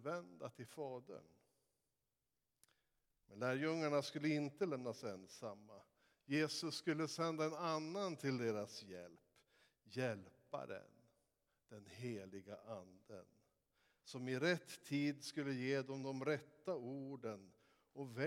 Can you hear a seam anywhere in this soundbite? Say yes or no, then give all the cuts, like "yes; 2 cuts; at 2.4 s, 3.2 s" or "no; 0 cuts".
no; 0 cuts